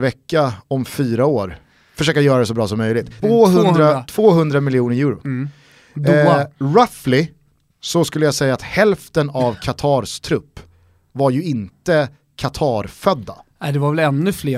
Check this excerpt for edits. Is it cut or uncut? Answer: cut